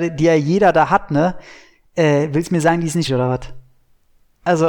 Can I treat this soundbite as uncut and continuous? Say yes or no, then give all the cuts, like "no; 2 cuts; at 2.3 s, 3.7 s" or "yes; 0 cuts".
no; 1 cut; at 3.1 s